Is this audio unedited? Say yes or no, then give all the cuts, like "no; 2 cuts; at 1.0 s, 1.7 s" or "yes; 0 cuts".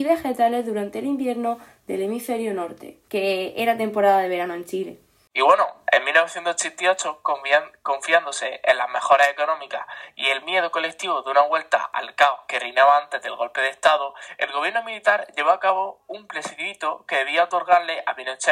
no; 1 cut; at 3.1 s